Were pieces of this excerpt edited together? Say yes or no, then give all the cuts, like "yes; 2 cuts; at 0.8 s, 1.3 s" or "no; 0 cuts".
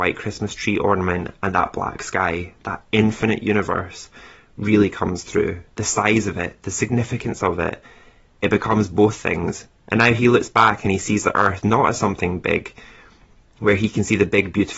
yes; 2 cuts; at 5.7 s, 9.7 s